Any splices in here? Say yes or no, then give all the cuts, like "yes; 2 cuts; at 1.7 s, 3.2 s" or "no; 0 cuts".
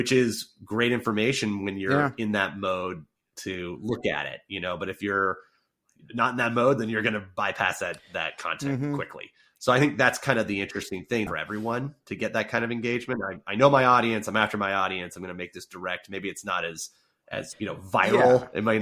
yes; 1 cut; at 11.3 s